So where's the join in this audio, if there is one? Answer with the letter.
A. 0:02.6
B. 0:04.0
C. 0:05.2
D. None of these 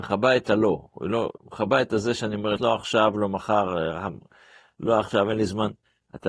A